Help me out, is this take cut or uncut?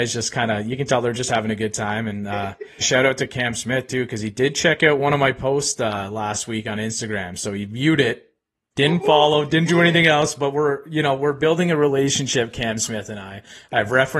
cut